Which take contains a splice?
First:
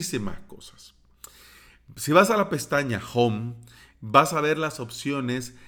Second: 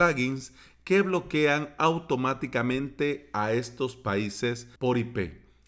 second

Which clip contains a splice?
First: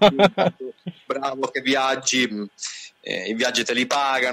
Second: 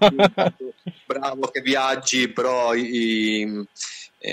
first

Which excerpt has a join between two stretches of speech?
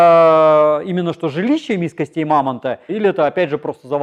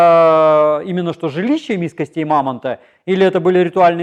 first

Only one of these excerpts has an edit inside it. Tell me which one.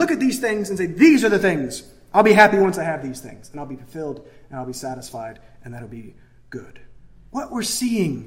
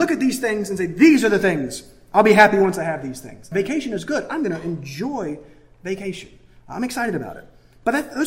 second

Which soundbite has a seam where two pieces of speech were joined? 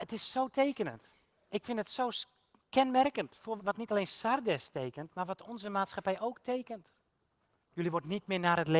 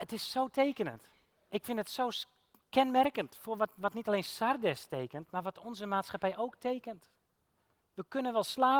first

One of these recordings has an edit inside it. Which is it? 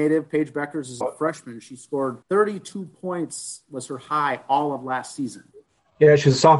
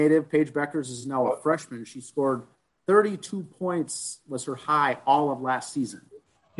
first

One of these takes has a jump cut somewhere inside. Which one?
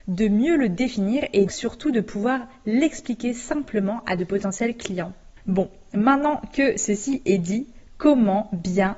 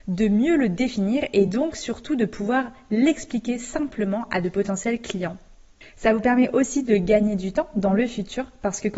first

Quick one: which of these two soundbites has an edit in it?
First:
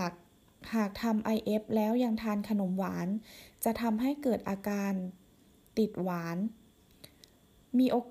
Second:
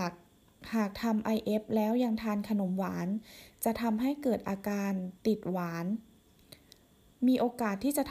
second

